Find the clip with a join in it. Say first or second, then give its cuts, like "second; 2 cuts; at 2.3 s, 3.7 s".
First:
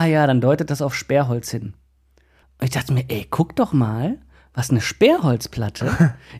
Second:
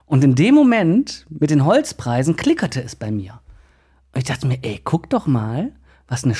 first; 1 cut; at 2.4 s